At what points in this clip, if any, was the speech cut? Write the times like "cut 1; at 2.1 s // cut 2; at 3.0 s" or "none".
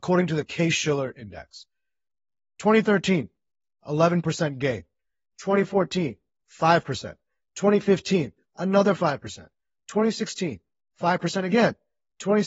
none